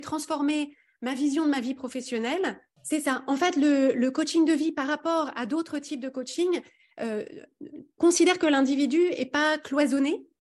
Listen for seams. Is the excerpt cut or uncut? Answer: cut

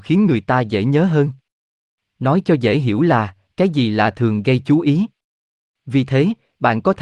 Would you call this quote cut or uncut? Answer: uncut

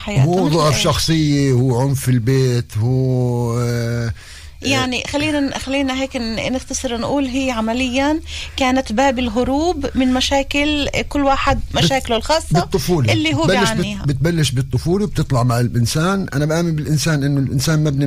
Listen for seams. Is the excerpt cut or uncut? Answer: uncut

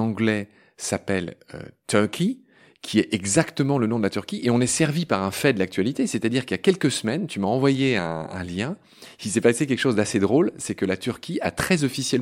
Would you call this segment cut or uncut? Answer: uncut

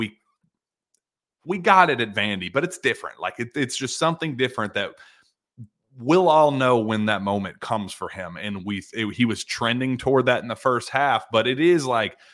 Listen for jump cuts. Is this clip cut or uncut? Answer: uncut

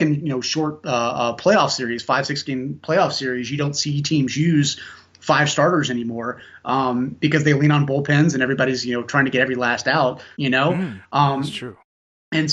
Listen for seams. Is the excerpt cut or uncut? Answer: cut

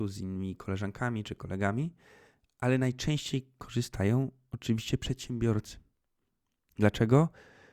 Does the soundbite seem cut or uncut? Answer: uncut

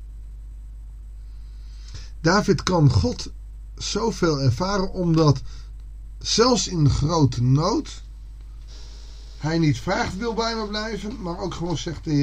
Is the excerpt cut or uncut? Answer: uncut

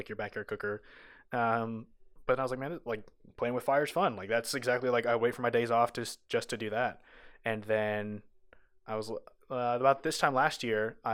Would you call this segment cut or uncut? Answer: uncut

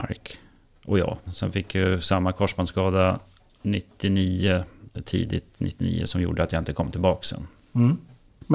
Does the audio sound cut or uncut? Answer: cut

